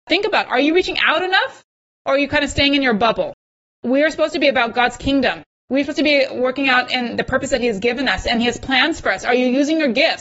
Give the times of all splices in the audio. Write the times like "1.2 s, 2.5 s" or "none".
none